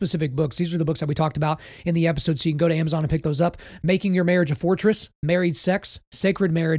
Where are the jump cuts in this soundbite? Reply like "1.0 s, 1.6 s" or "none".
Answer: none